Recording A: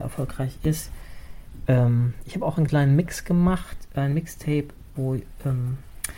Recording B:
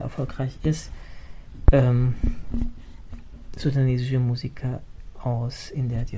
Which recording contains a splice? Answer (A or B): A